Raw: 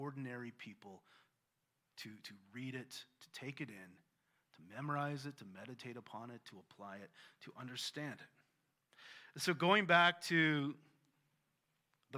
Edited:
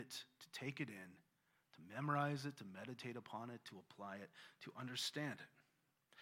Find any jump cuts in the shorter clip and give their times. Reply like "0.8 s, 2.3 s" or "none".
none